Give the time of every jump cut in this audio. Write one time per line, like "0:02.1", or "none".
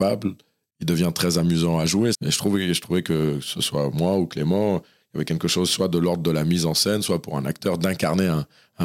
0:02.1